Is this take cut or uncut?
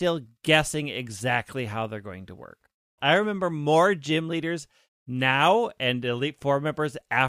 cut